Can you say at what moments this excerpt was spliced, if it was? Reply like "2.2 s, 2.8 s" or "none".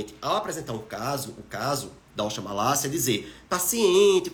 none